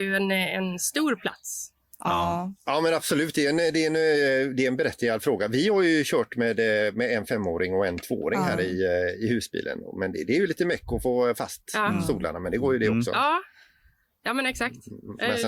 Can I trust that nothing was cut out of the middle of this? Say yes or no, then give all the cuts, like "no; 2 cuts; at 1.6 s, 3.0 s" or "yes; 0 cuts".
yes; 0 cuts